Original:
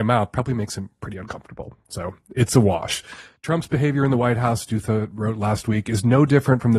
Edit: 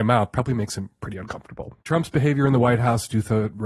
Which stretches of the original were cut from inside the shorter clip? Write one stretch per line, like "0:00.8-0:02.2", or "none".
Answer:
0:01.8-0:03.4